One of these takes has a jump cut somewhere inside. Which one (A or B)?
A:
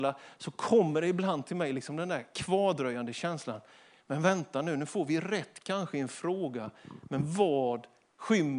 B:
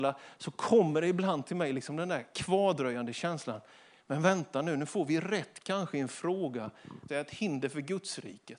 B